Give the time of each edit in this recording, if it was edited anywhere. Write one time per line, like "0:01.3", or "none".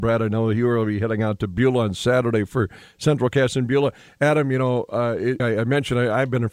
0:05.4